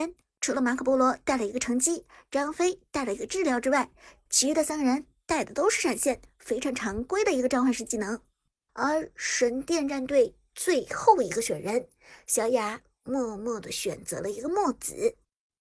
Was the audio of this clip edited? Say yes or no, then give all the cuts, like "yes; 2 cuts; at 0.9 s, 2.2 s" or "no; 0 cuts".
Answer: yes; 1 cut; at 8.7 s